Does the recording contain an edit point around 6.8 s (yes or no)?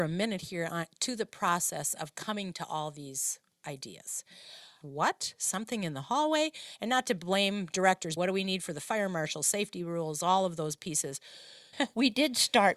no